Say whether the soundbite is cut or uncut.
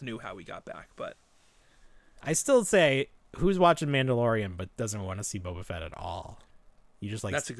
uncut